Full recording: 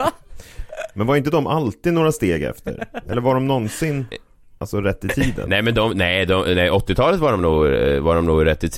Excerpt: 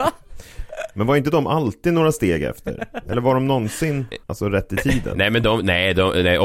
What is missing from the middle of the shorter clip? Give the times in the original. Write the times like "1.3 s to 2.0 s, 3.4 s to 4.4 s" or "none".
4.2 s to 4.6 s